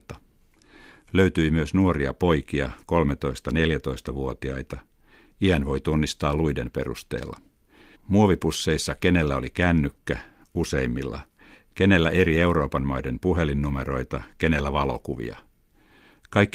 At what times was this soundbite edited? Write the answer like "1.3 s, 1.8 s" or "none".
7.9 s

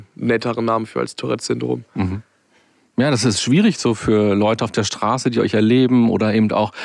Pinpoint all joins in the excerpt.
none

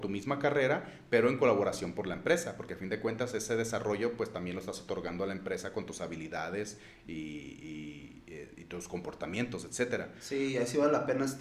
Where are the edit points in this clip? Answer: none

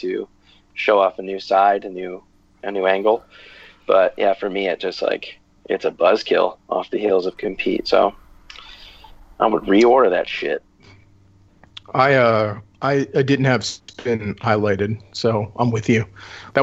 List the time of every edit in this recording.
none

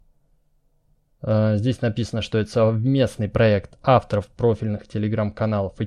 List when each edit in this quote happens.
none

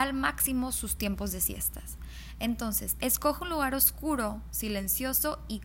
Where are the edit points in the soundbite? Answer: 3.0 s

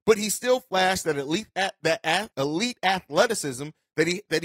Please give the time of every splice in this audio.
2.3 s

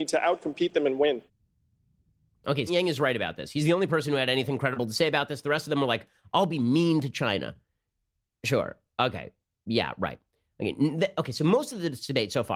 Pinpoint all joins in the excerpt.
2.7 s

